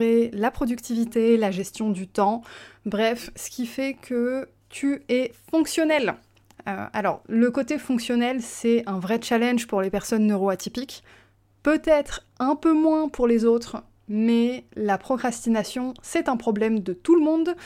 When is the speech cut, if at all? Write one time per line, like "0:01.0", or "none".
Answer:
0:06.5